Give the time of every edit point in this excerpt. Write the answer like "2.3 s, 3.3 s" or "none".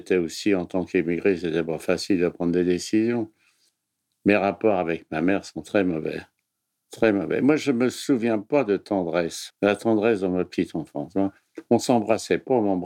9.5 s